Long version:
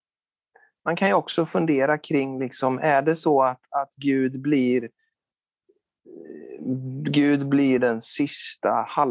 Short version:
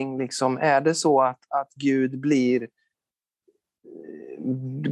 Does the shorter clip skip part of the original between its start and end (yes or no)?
no